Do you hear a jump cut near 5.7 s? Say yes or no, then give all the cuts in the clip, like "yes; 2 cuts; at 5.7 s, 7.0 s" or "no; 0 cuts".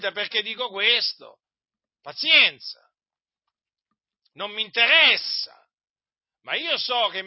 no; 0 cuts